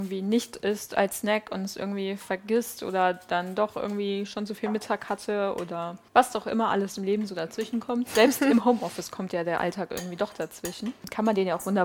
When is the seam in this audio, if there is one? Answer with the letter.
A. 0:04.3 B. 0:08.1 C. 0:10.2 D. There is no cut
D